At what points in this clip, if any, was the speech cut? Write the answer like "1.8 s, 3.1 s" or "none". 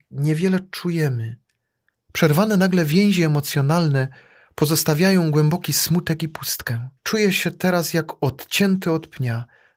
1.9 s, 7.0 s